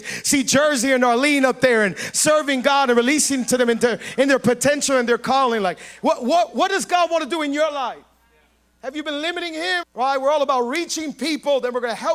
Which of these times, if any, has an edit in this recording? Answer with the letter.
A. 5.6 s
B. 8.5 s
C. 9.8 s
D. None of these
C